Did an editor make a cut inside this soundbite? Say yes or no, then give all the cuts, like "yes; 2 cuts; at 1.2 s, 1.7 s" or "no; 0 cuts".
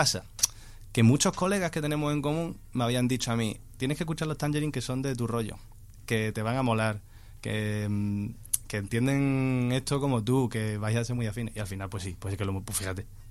no; 0 cuts